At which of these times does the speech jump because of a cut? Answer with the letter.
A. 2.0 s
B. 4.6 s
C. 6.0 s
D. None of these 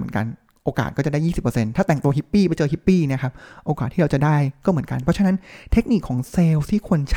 D